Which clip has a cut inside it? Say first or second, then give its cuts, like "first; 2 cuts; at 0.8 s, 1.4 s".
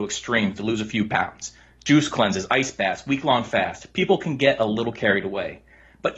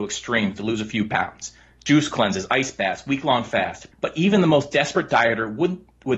second; 1 cut; at 3.9 s